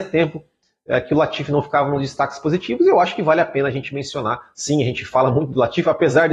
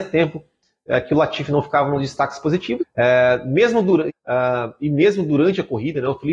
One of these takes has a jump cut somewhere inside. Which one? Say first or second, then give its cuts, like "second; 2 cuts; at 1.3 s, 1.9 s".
second; 2 cuts; at 2.8 s, 4.1 s